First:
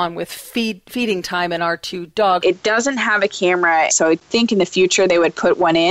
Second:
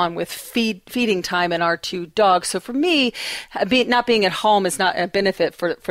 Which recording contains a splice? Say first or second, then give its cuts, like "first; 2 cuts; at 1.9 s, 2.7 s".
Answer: first; 2 cuts; at 2.4 s, 3.9 s